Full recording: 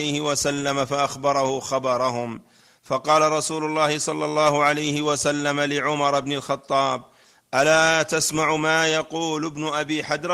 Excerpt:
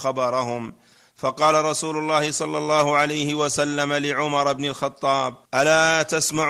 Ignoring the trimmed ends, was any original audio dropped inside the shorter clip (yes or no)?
yes